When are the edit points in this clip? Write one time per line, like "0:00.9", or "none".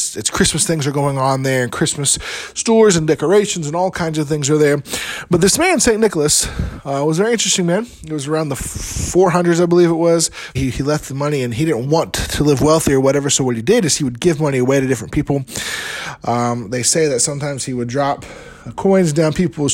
0:10.6